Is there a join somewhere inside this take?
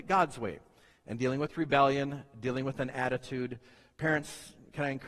no; 0 cuts

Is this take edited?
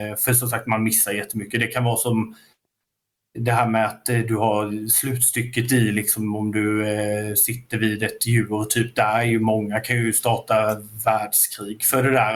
no; 0 cuts

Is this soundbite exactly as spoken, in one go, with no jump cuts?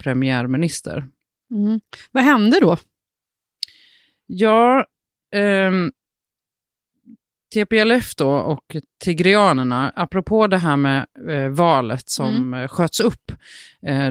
yes; 0 cuts

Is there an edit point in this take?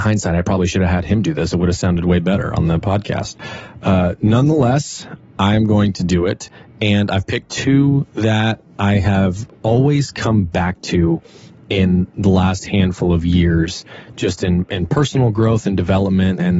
no; 0 cuts

